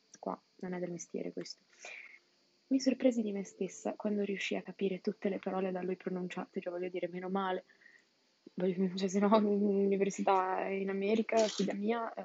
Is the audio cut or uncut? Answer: uncut